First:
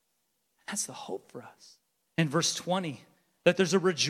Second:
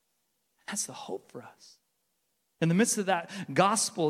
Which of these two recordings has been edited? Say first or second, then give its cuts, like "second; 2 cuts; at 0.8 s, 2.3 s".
first; 1 cut; at 2.1 s